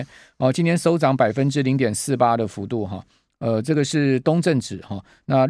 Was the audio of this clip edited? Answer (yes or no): no